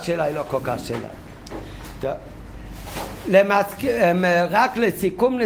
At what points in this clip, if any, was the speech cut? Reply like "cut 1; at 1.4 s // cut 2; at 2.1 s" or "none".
none